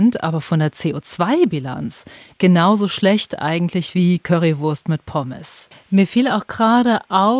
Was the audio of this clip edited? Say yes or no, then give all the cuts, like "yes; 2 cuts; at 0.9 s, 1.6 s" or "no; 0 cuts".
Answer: yes; 1 cut; at 5.7 s